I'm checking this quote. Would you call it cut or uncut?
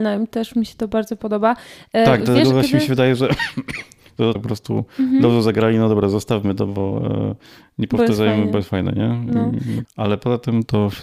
cut